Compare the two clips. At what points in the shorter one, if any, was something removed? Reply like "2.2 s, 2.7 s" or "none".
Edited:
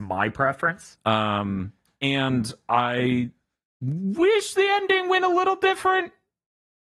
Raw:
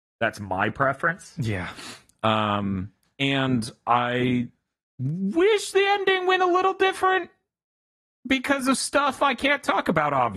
0.9 s